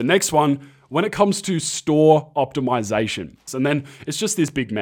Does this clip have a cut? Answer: yes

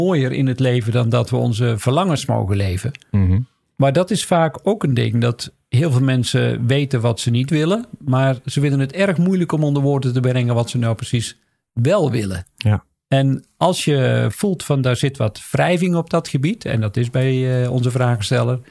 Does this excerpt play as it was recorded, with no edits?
yes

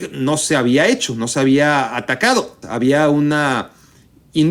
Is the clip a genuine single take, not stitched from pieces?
no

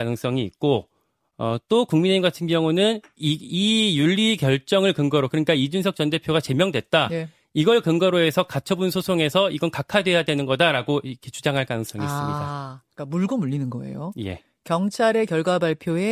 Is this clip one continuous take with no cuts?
yes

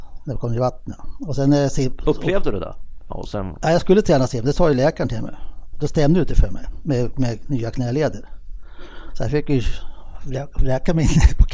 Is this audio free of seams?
no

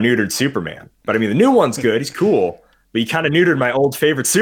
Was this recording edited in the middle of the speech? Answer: no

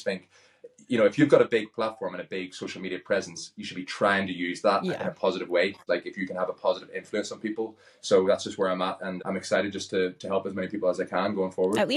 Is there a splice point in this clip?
yes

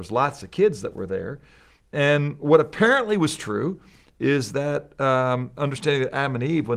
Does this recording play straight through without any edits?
yes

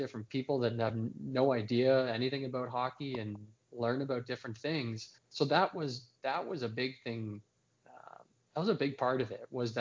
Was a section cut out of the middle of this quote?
yes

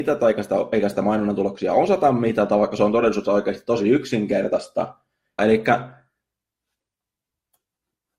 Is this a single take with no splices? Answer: no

